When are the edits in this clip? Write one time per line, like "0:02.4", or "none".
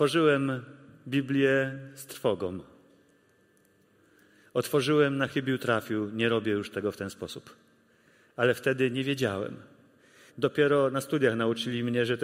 0:10.3